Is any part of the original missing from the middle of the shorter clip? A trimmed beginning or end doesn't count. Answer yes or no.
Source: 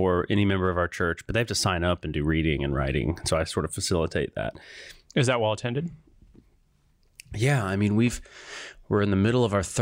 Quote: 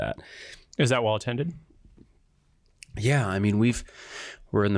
no